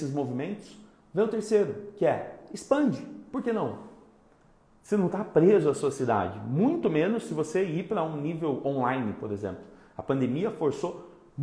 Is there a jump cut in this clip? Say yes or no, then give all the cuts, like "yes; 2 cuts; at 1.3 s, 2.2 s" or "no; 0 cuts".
no; 0 cuts